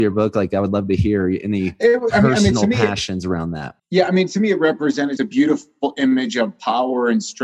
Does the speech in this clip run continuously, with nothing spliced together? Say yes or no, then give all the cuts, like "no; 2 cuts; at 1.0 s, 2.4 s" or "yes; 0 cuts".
no; 2 cuts; at 3.8 s, 5.2 s